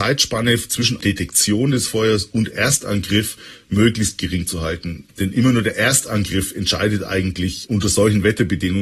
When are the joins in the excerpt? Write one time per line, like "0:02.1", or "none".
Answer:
none